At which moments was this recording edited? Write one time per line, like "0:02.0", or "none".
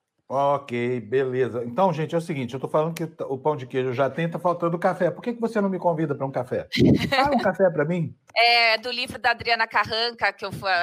0:08.3